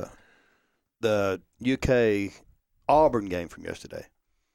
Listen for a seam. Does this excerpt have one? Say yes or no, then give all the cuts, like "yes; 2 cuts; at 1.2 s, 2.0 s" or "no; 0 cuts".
no; 0 cuts